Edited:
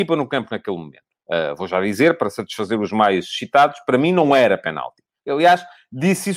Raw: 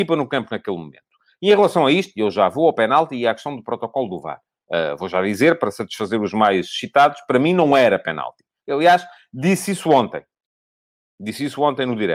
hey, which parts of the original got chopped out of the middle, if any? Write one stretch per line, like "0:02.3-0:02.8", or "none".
0:01.1-0:04.5